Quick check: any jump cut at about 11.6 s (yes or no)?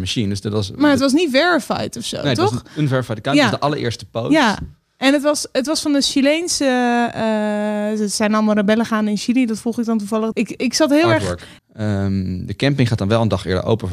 yes